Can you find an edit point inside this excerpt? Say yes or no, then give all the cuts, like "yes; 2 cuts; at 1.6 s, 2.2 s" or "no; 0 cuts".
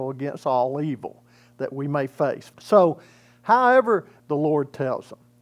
yes; 2 cuts; at 2.5 s, 4.2 s